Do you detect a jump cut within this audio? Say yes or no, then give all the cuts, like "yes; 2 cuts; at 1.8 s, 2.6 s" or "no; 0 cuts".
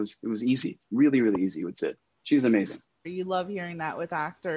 yes; 1 cut; at 3.0 s